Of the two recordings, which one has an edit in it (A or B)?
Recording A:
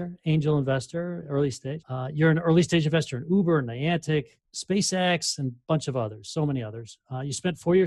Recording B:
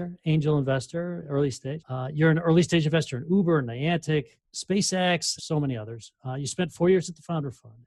B